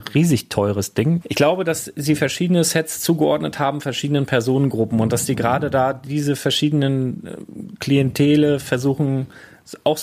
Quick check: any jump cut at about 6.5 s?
no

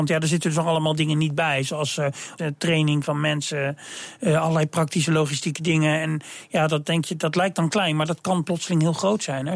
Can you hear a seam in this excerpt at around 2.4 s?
yes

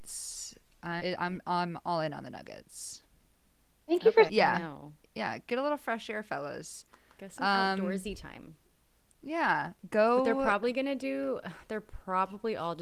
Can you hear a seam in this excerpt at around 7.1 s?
no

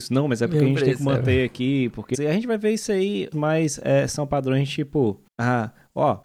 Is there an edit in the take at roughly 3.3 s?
yes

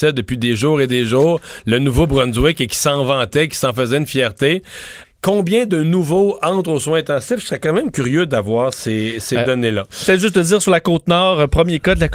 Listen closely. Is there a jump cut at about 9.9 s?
no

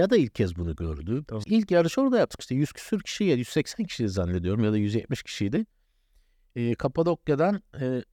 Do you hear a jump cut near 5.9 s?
no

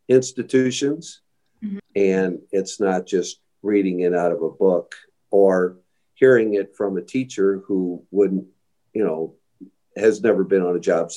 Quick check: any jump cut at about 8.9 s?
no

